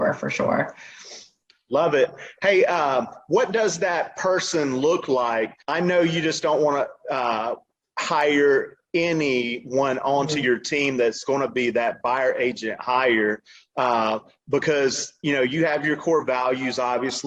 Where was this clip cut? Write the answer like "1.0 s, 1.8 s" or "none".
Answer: none